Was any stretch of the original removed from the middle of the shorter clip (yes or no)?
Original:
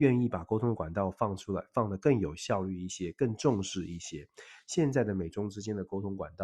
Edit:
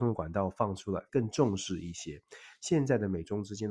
yes